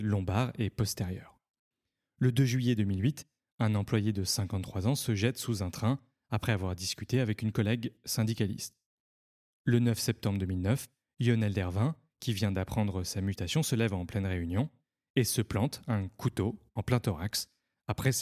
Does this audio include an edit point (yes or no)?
no